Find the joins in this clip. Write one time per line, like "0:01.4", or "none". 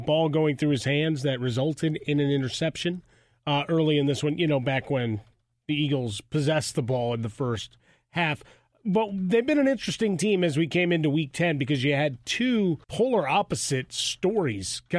0:12.8